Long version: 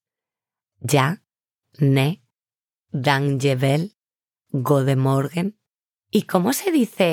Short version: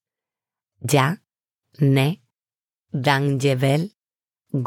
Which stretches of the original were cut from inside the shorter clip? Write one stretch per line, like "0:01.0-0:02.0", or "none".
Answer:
none